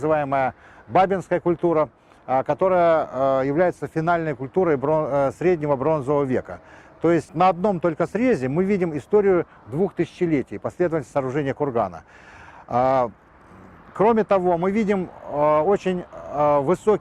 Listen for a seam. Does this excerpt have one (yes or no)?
yes